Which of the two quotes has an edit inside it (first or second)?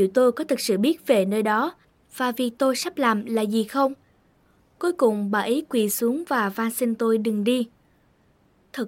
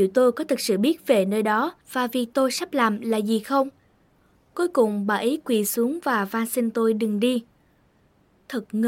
second